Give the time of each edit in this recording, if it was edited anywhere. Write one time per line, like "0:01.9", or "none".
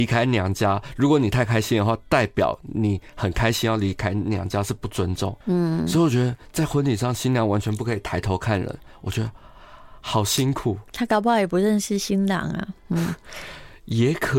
0:05.4